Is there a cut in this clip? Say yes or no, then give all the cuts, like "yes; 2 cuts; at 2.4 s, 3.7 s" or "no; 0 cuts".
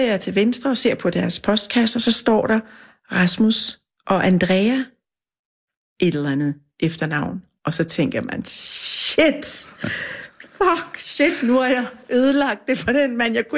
no; 0 cuts